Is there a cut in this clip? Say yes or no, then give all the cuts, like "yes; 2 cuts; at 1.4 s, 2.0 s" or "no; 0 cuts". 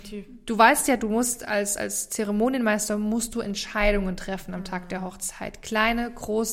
no; 0 cuts